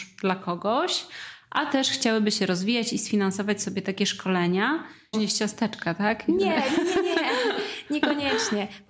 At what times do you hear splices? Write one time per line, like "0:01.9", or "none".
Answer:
0:05.1